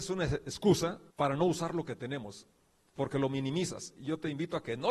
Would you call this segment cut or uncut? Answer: cut